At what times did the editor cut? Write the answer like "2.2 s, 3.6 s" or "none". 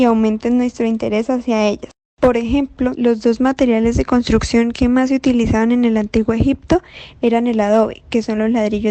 2.9 s